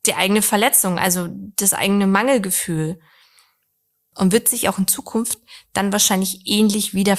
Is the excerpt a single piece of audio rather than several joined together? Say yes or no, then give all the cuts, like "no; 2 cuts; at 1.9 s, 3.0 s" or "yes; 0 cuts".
yes; 0 cuts